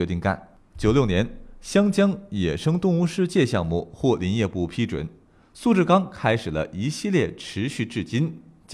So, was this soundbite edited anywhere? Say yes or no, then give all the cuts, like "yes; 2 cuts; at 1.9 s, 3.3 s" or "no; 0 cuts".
no; 0 cuts